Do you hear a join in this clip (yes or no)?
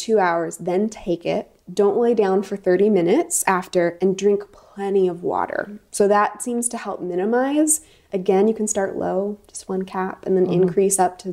no